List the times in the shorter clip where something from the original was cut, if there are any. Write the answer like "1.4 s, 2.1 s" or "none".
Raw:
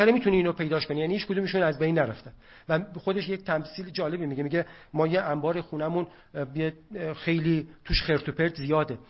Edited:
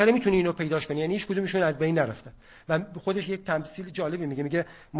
none